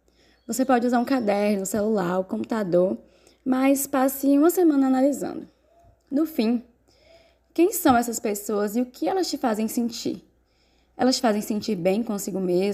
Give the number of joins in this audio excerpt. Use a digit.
0